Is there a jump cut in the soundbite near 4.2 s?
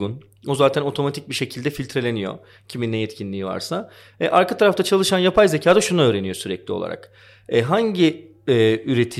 no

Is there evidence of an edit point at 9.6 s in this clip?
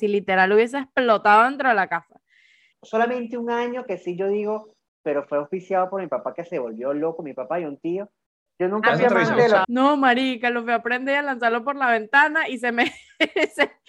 yes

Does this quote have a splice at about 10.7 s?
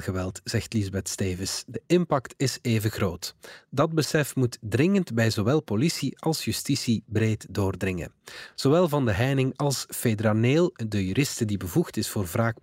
no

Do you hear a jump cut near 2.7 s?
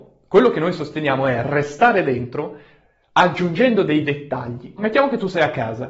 no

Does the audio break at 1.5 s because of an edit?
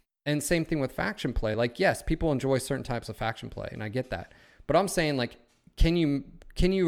no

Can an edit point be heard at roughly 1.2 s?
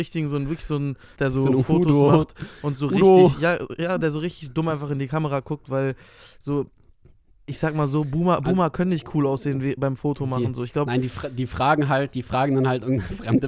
yes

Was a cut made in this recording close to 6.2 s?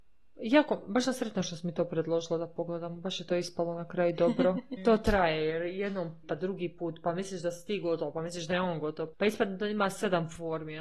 yes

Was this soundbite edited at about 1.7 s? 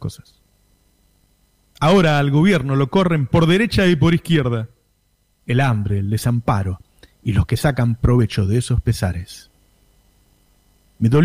no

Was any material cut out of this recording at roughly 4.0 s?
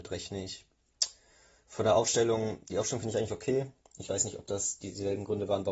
yes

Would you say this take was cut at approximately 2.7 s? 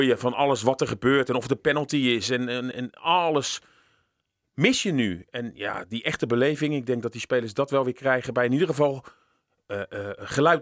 yes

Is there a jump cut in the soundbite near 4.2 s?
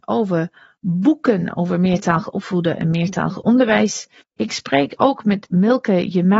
yes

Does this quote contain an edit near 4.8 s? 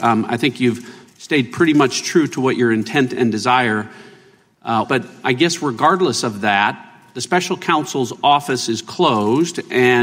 yes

